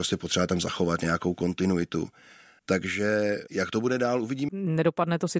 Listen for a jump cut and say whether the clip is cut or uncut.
cut